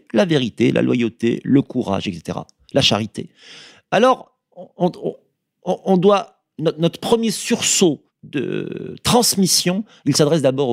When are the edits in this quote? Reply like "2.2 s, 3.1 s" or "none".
none